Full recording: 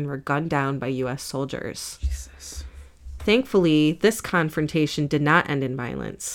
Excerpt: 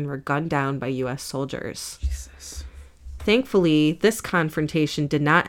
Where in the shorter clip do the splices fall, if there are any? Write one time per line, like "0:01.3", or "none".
none